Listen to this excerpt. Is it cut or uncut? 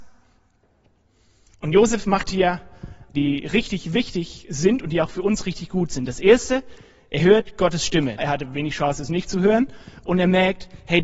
cut